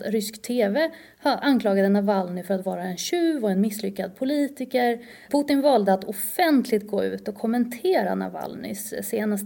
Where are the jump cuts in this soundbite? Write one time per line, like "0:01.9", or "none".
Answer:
0:01.4
0:05.3